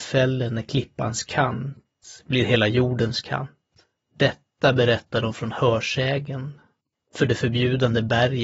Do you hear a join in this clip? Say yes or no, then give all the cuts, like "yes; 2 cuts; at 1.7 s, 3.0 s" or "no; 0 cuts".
yes; 1 cut; at 4.0 s